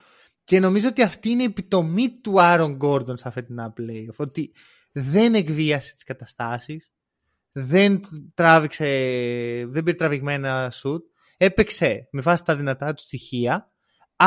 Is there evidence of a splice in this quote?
no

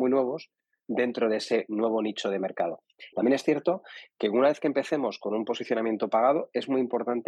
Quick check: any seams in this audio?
yes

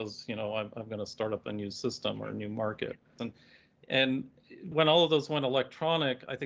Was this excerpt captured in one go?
no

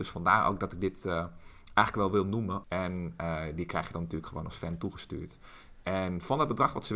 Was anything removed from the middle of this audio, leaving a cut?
yes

